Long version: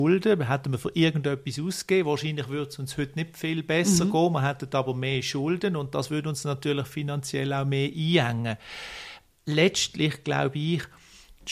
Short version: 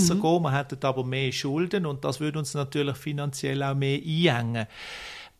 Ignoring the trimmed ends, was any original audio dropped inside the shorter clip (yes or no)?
no